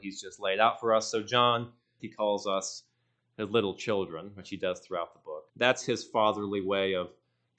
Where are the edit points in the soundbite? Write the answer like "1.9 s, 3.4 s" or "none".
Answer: 2.0 s, 5.5 s